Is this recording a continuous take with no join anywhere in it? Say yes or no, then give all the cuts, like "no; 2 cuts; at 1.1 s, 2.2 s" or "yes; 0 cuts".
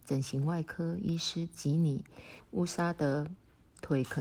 no; 1 cut; at 2.4 s